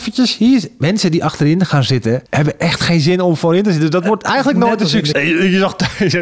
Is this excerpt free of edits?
no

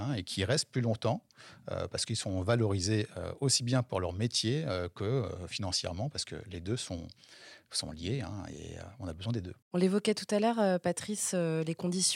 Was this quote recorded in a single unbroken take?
no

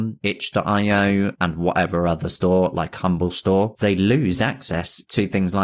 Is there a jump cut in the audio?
no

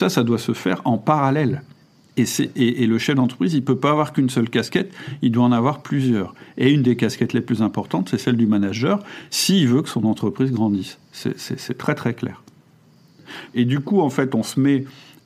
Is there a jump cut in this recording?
yes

